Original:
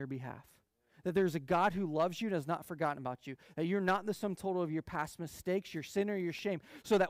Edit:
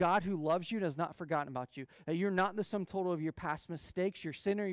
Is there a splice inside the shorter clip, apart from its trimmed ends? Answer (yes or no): no